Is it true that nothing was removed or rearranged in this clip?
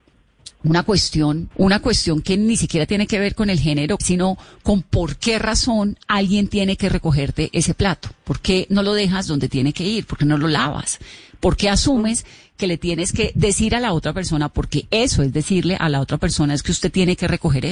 no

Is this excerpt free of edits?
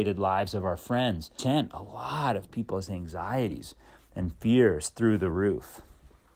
no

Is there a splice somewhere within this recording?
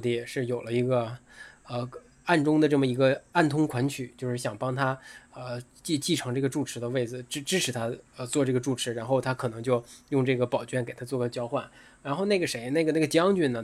no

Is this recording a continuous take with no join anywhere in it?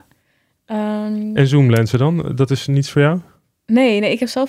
no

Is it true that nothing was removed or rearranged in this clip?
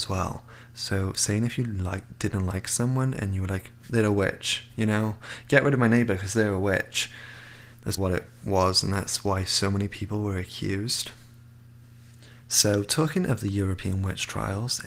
no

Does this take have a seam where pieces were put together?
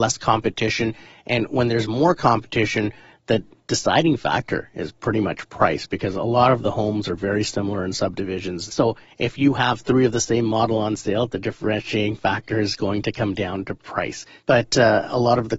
yes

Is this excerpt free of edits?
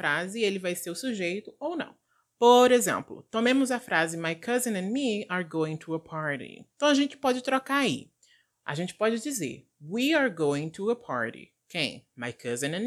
yes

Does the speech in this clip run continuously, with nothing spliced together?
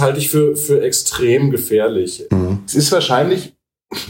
no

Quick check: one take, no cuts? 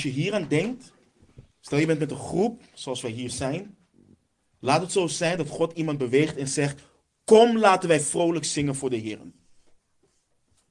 no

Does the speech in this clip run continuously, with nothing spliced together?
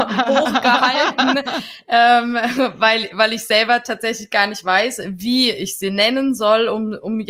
yes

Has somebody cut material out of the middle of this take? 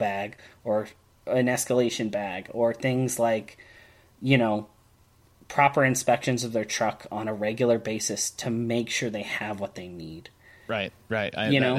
no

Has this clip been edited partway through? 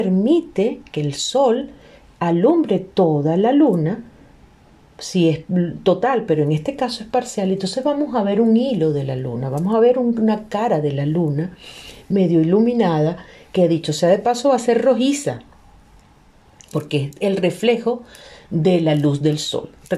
no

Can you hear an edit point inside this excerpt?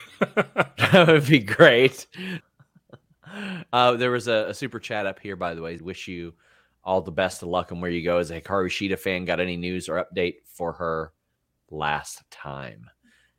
yes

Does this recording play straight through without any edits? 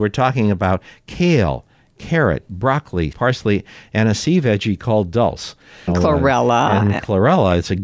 no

